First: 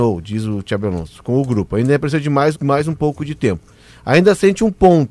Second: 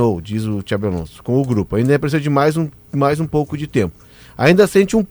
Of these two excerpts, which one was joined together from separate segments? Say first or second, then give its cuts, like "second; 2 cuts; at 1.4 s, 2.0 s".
first; 1 cut; at 2.5 s